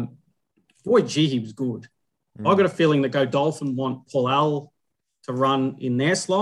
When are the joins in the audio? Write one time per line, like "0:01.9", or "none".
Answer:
none